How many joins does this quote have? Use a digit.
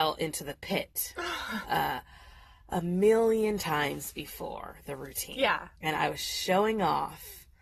2